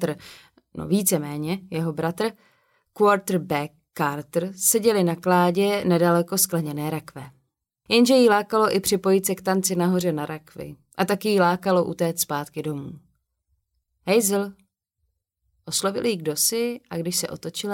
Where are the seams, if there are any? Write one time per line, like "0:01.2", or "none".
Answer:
0:07.9